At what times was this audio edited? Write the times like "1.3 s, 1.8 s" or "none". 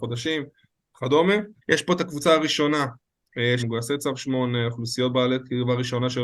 1.6 s, 3.6 s